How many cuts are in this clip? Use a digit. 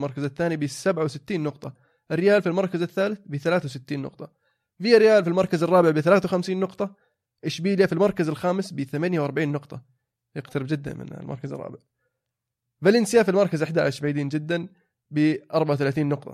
0